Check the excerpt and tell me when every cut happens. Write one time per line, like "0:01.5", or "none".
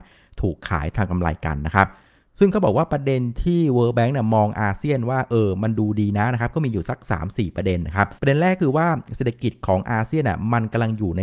0:08.2